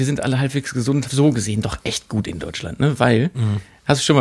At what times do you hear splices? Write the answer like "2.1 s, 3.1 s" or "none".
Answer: 1.0 s